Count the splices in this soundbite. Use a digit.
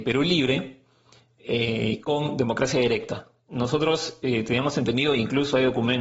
0